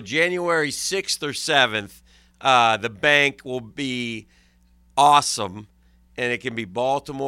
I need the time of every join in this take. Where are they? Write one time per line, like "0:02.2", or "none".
none